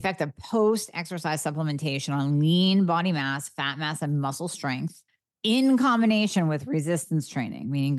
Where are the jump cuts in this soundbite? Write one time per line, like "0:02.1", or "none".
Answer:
none